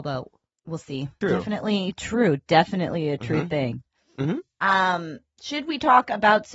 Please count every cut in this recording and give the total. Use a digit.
1